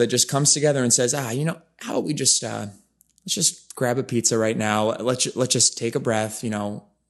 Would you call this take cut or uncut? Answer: uncut